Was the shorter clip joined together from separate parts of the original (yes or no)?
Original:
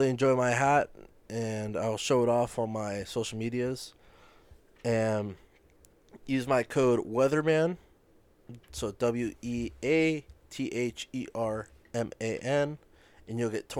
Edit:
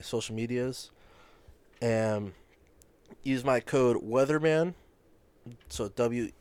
no